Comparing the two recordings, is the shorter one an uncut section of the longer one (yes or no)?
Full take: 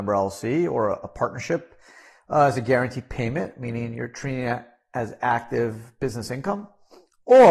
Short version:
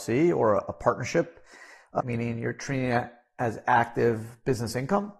no